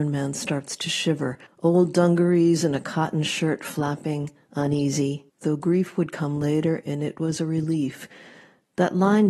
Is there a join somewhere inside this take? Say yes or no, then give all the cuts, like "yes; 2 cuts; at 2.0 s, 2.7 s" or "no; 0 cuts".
yes; 2 cuts; at 1.5 s, 5.3 s